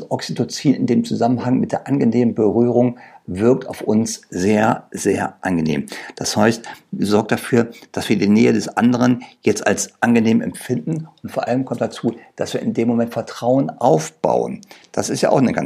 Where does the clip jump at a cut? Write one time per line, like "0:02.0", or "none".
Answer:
none